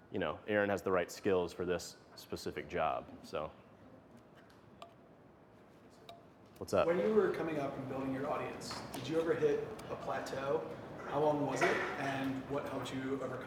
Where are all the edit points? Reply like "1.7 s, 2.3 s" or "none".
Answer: none